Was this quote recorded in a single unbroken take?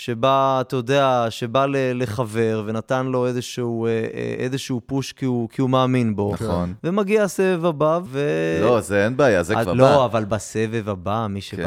no; 2 cuts; at 8.1 s, 9.7 s

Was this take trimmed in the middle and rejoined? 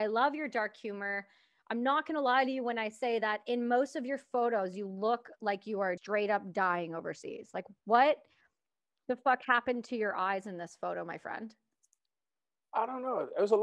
yes; 1 cut; at 6.0 s

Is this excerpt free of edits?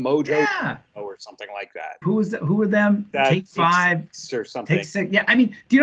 no; 1 cut; at 2.0 s

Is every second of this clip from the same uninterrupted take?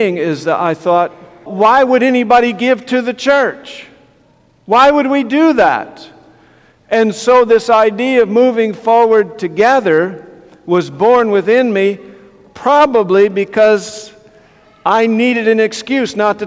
no; 1 cut; at 1.5 s

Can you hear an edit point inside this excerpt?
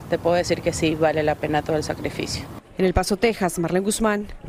no; 0 cuts

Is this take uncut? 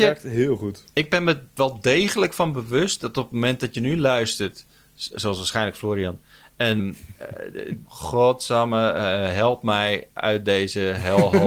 no; 2 cuts; at 6.8 s, 7.8 s

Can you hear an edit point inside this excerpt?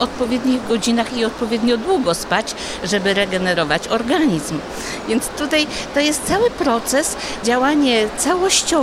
yes; 1 cut; at 7.4 s

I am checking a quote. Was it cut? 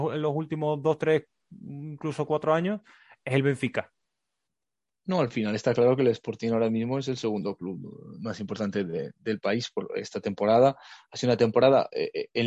no; 0 cuts

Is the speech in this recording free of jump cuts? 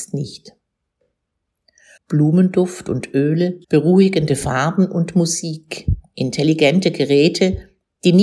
no; 2 cuts; at 2.0 s, 3.6 s

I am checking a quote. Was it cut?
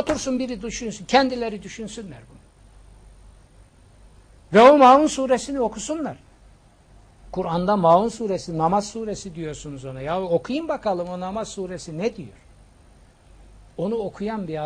no; 0 cuts

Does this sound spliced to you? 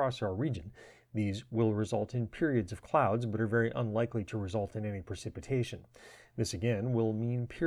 no; 0 cuts

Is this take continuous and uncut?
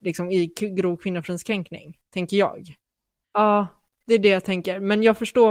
no; 1 cut; at 3.2 s

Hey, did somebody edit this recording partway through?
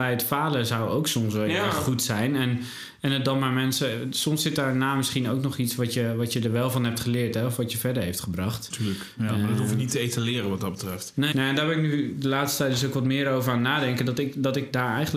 yes; 1 cut; at 11.3 s

